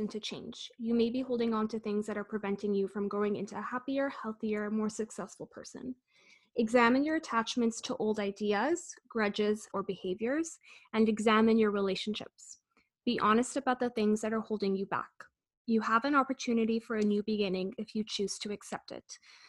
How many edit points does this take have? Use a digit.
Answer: 1